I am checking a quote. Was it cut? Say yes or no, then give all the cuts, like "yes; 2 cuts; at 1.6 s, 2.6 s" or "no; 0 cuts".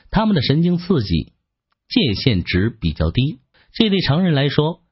yes; 1 cut; at 3.5 s